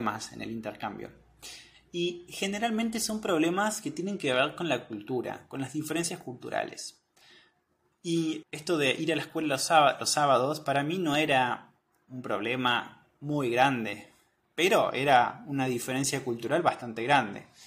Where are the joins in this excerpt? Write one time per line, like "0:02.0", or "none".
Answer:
0:08.4
0:13.1